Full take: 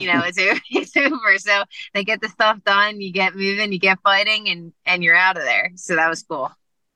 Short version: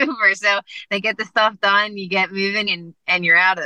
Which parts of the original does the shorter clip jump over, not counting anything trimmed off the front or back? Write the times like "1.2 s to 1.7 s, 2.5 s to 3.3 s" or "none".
3.7 s to 4.4 s